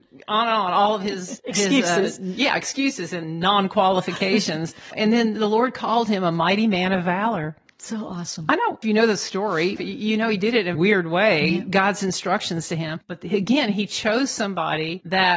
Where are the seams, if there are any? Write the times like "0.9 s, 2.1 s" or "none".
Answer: 10.7 s